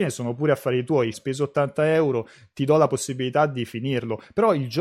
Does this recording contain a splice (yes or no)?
yes